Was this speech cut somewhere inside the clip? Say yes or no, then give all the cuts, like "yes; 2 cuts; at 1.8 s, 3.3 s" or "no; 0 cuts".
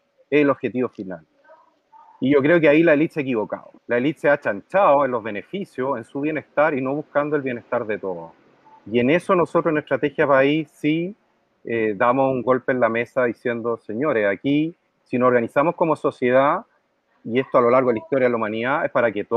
yes; 1 cut; at 3.8 s